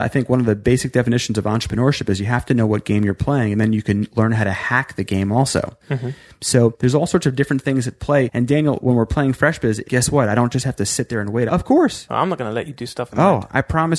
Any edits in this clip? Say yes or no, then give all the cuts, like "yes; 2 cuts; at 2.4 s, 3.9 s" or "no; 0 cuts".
yes; 2 cuts; at 9.8 s, 11.5 s